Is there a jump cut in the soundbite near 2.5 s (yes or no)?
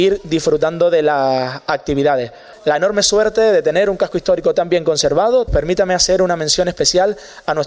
yes